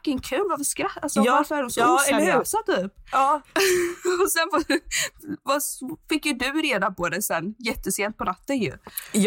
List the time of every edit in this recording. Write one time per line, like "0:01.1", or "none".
0:03.4